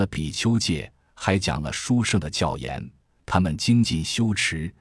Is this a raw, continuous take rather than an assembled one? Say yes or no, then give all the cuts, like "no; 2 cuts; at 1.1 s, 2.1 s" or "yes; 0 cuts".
yes; 0 cuts